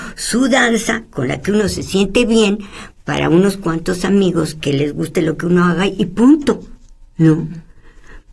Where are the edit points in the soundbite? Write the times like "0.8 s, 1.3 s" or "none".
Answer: 7.1 s